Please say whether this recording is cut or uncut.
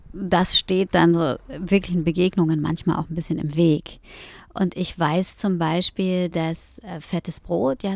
uncut